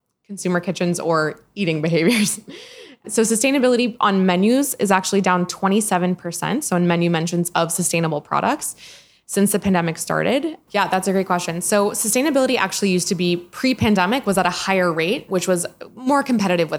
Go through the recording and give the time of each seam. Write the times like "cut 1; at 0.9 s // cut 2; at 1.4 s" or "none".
cut 1; at 3.0 s // cut 2; at 10.7 s // cut 3; at 15.3 s

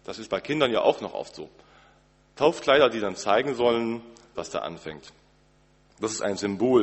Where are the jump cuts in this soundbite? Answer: cut 1; at 4.3 s

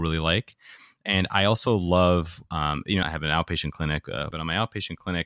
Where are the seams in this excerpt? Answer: cut 1; at 3.0 s // cut 2; at 4.3 s

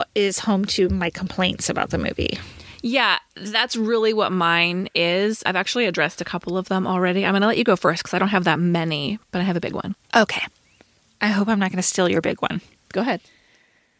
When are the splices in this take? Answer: cut 1; at 9.9 s

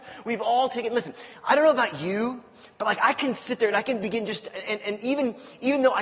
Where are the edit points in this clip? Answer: none

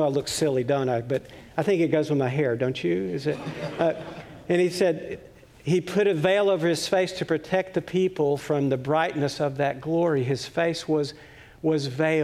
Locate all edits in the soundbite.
none

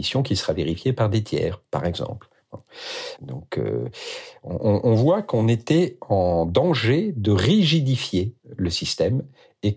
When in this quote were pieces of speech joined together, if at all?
cut 1; at 3.2 s // cut 2; at 8.4 s

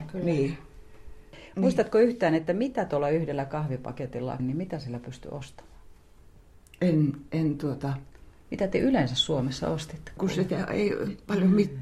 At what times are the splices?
cut 1; at 4.4 s // cut 2; at 10.2 s

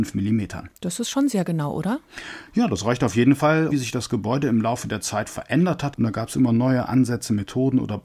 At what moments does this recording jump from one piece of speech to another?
cut 1; at 3.7 s // cut 2; at 5.9 s

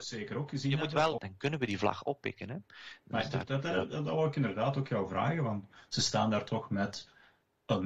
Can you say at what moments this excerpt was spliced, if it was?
cut 1; at 1.2 s

